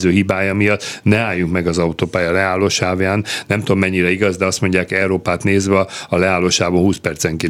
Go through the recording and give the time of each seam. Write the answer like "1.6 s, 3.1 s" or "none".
none